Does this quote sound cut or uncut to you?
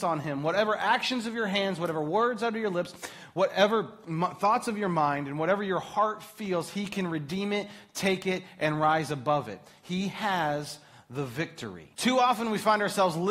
cut